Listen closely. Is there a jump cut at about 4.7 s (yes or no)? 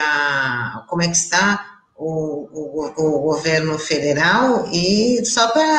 no